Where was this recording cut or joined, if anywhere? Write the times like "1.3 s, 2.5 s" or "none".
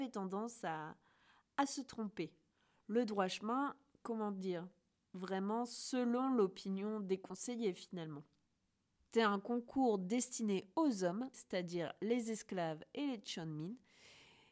9.1 s, 11.3 s